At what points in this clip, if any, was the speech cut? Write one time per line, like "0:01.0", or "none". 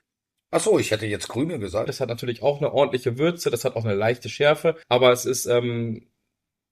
0:01.9
0:04.8

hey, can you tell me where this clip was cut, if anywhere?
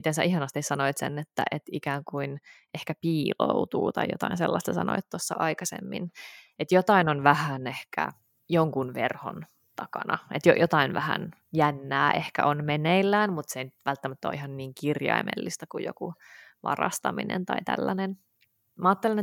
none

